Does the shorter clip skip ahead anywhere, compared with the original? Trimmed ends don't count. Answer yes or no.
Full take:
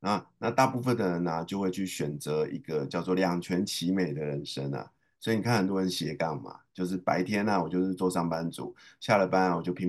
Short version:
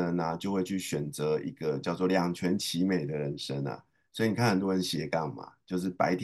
no